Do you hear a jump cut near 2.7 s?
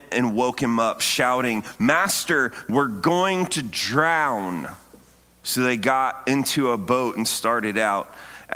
yes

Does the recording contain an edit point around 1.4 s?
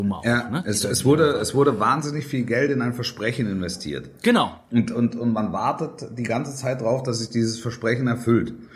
no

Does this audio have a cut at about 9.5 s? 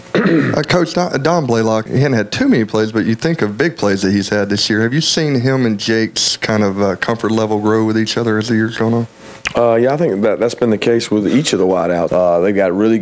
no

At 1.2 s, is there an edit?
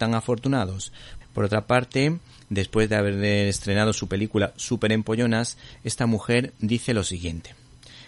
yes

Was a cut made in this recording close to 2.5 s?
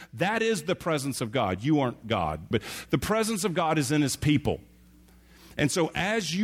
yes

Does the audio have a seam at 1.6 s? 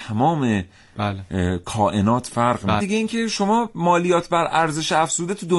no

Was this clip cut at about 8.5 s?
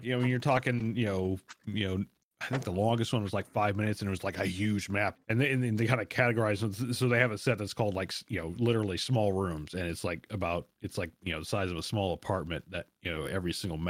no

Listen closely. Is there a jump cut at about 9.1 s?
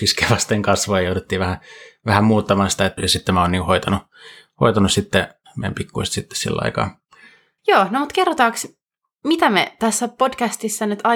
no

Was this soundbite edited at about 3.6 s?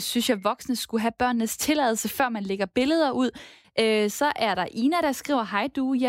yes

